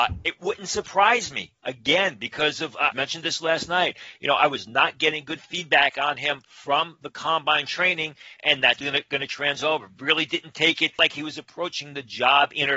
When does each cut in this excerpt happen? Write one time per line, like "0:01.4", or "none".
0:02.9
0:08.8